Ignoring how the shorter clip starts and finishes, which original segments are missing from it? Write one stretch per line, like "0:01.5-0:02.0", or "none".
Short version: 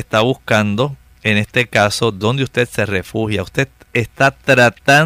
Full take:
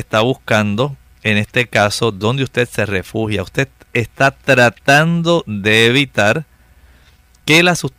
none